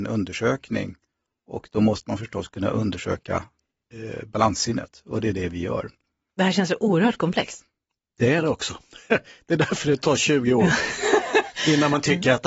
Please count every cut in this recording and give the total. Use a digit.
0